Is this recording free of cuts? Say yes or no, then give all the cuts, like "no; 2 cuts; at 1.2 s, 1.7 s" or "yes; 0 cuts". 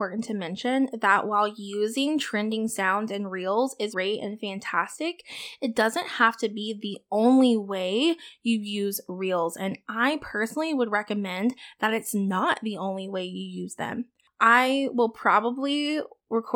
no; 1 cut; at 3.9 s